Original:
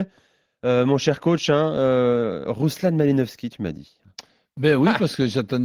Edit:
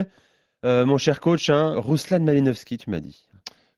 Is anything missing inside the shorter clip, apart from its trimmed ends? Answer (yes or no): yes